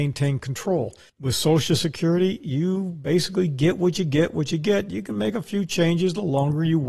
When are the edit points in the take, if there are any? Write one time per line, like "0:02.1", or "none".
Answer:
none